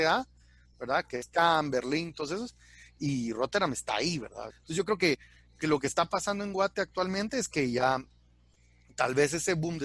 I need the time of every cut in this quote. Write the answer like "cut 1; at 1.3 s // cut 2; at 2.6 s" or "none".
cut 1; at 4.5 s